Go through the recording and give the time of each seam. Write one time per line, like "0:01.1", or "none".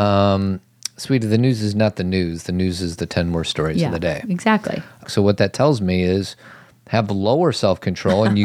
0:05.0